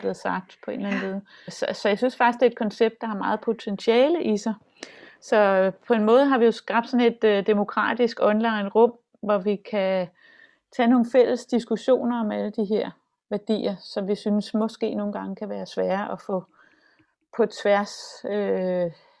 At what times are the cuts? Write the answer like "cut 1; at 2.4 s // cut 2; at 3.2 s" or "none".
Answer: cut 1; at 1.5 s